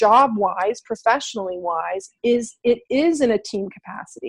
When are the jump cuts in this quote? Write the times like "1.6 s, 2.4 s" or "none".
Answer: 2.2 s